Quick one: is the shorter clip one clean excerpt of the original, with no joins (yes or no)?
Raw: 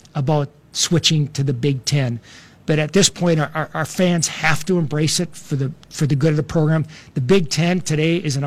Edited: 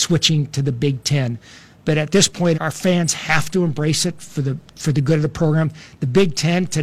no